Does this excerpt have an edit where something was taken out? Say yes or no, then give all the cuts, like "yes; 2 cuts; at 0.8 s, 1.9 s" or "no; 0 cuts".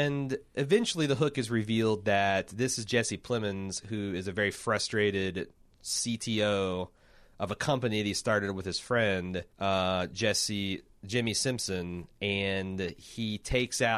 yes; 1 cut; at 9.5 s